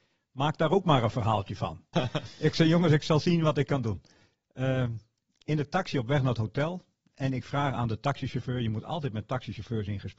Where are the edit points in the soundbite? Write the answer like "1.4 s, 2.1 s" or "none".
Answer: 1.9 s